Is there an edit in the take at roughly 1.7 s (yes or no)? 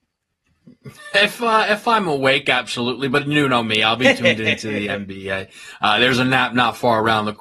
no